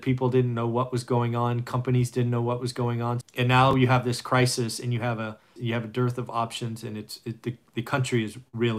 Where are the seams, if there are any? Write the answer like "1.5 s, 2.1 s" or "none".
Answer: 3.2 s, 5.6 s